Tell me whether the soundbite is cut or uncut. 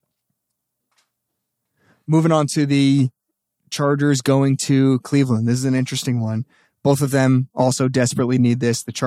uncut